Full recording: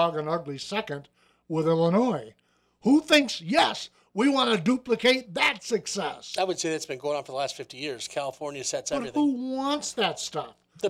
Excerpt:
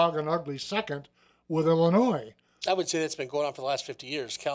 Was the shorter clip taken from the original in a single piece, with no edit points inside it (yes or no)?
no